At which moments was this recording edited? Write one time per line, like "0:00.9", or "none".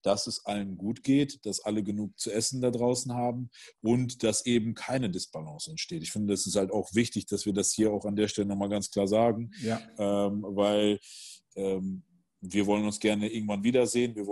none

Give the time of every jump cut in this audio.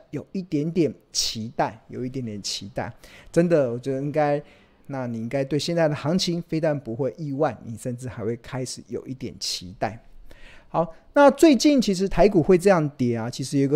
0:04.8

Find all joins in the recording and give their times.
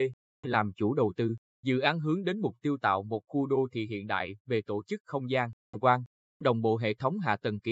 0:01.5
0:05.7

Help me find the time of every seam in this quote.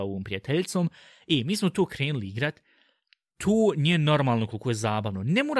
none

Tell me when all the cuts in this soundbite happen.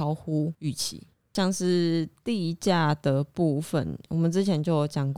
none

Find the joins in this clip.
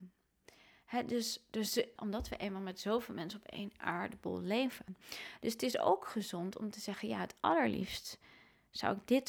0:02.0

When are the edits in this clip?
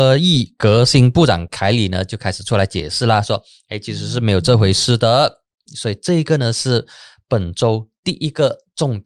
0:05.7

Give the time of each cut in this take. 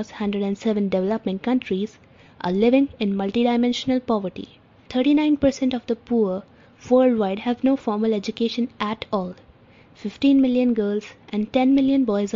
0:04.9

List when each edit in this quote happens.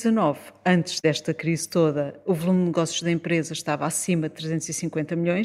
none

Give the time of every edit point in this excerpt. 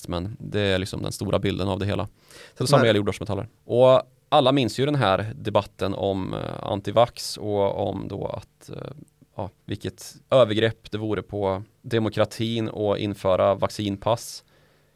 0:03.6
0:09.6

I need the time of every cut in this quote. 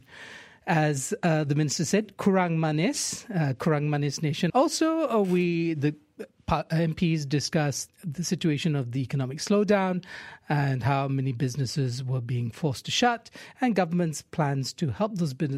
0:04.5
0:07.9

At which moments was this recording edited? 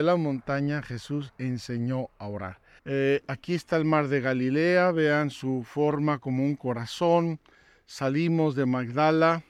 0:02.8

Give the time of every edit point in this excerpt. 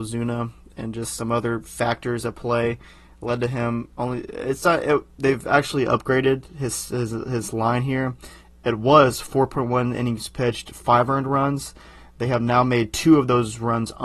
none

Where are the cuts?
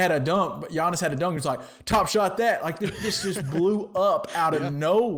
none

